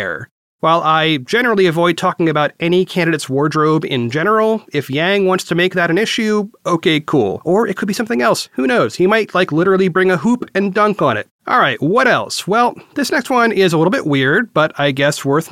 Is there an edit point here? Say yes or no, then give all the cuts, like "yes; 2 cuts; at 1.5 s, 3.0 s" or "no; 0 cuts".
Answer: yes; 1 cut; at 11.4 s